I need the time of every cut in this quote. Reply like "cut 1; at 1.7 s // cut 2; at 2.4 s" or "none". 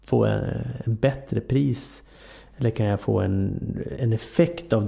cut 1; at 4.0 s